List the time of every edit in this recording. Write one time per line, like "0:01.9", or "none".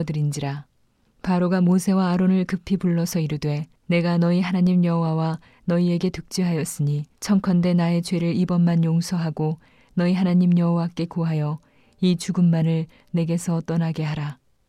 0:01.1
0:03.8
0:07.1